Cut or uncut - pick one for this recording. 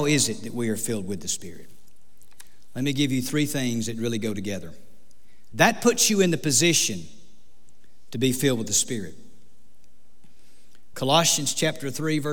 cut